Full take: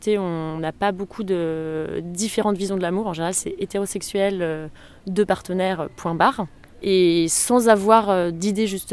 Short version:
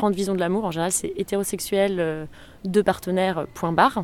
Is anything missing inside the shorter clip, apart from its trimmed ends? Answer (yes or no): no